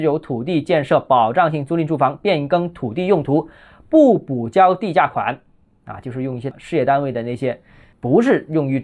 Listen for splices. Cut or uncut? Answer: uncut